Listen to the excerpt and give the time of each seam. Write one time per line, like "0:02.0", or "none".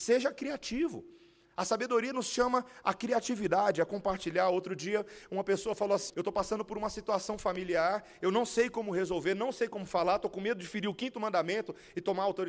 0:06.1